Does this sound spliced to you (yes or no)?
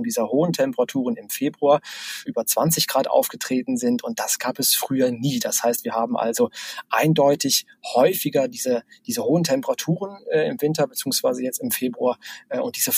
yes